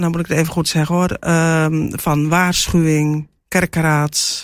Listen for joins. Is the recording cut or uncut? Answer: uncut